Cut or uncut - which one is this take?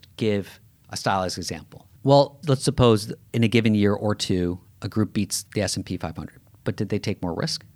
cut